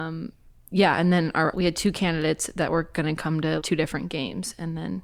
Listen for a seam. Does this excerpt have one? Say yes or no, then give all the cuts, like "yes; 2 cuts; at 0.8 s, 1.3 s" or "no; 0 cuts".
yes; 2 cuts; at 1.5 s, 3.6 s